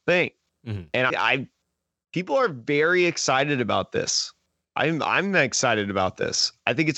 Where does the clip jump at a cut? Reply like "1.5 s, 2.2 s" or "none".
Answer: 1.1 s